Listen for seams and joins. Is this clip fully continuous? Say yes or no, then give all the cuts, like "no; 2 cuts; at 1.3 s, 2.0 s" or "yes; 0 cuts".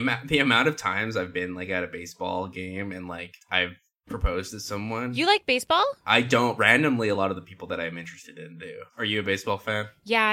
yes; 0 cuts